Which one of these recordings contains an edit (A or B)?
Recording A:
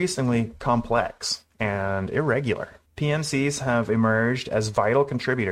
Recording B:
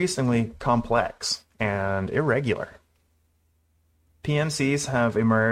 A